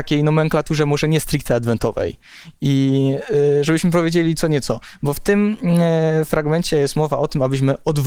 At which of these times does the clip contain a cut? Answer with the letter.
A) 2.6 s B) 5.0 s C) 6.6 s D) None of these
D